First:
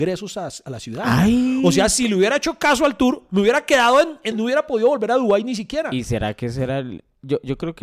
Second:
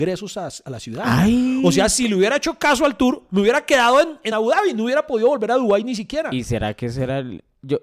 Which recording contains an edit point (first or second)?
first